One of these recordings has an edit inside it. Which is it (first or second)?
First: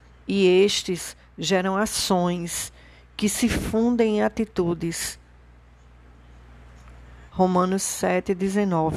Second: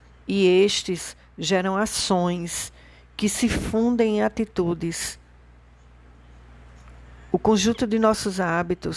first